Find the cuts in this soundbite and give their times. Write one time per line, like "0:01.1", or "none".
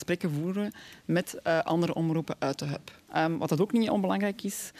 0:03.1